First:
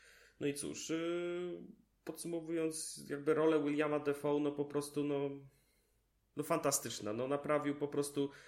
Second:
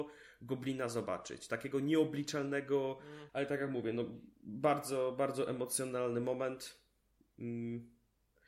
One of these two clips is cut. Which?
second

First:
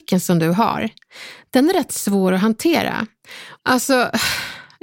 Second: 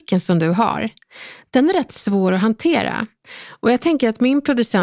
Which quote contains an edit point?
first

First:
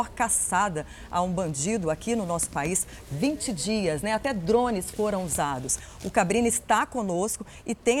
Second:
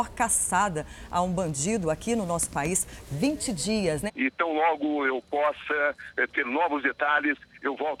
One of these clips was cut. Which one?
second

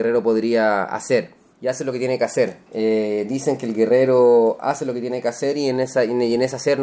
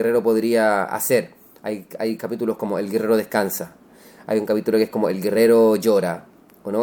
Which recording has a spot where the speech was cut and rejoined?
first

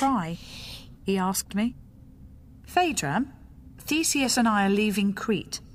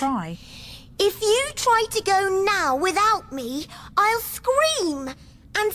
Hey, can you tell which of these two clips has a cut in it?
first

